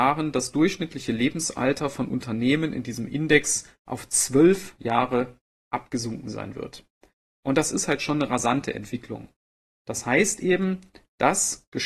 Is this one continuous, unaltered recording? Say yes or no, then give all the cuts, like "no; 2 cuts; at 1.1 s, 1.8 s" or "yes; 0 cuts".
no; 1 cut; at 9.8 s